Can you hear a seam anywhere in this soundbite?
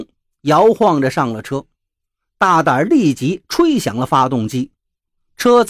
no; 0 cuts

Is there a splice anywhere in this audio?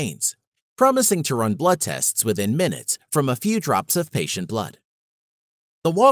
no; 0 cuts

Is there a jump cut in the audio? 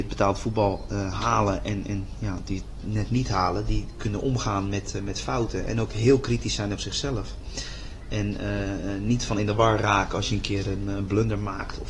no; 0 cuts

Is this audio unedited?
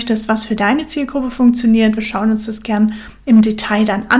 yes; 0 cuts

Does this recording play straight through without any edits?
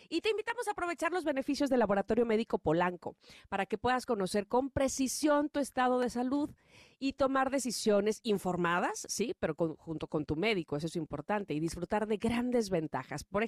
yes; 0 cuts

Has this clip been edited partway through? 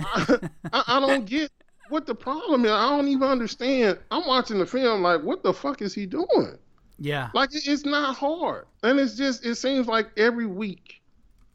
yes; 1 cut; at 8.8 s

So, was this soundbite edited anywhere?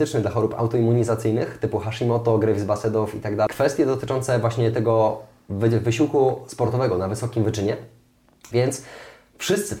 yes; 2 cuts; at 3.5 s, 8.5 s

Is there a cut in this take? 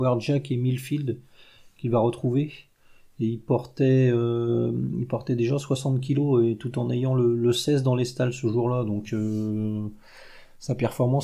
no; 0 cuts

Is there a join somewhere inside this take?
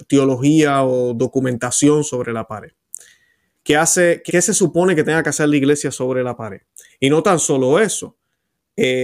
yes; 2 cuts; at 4.3 s, 6.9 s

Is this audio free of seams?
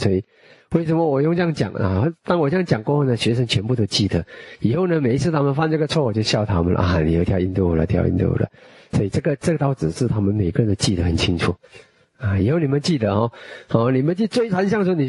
yes; 0 cuts

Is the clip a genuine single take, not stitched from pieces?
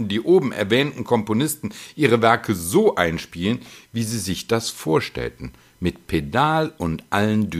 yes; 0 cuts

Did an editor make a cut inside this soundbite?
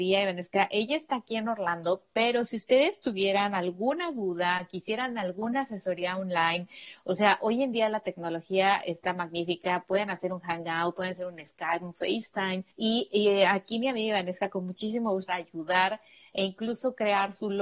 yes; 2 cuts; at 12.7 s, 15.3 s

